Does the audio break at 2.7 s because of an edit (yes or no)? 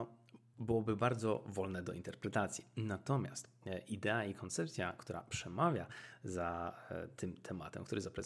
no